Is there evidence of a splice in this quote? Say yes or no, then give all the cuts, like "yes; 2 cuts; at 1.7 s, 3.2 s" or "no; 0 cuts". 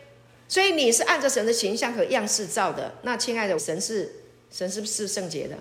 yes; 1 cut; at 3.6 s